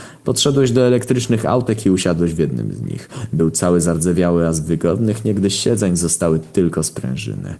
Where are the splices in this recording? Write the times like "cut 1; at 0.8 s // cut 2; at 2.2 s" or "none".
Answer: none